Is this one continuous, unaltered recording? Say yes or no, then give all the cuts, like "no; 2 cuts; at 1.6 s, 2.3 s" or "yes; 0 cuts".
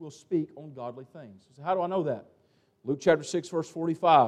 yes; 0 cuts